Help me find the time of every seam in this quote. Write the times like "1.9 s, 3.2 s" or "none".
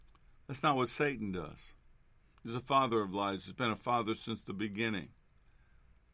2.3 s